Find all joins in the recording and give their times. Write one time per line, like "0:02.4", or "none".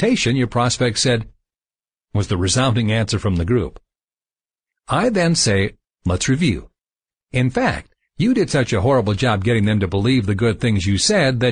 0:02.0
0:07.1